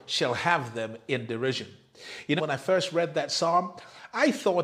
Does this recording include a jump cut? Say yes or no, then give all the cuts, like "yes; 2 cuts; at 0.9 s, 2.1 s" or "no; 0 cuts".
yes; 1 cut; at 2.4 s